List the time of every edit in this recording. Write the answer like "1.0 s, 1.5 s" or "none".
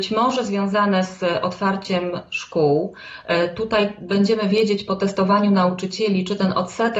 none